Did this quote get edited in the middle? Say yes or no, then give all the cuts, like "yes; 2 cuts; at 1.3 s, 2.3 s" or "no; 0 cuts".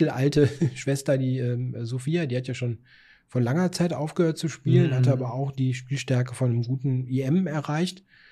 no; 0 cuts